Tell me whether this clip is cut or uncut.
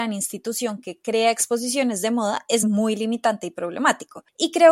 uncut